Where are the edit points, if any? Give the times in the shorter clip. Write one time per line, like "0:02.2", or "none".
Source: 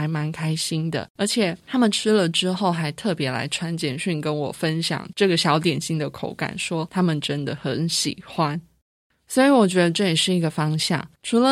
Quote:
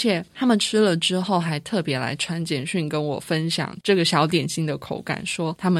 none